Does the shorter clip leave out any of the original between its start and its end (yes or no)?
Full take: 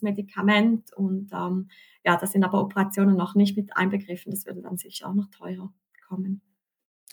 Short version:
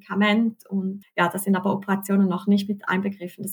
yes